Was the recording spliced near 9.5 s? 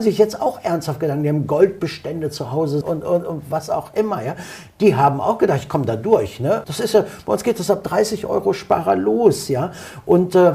no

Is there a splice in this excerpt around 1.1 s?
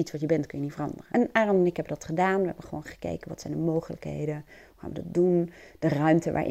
yes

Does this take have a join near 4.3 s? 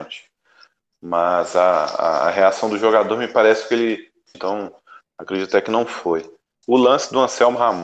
yes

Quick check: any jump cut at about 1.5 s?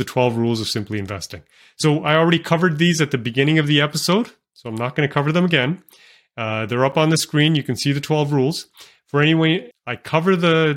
no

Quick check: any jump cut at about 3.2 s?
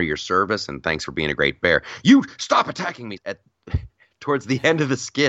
yes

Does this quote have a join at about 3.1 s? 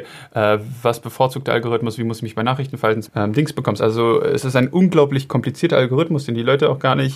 yes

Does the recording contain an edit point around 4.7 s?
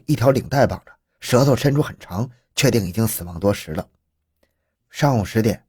yes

